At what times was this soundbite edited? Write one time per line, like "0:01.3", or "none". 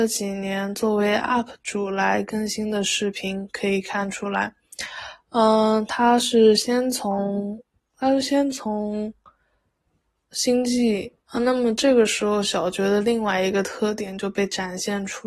0:11.3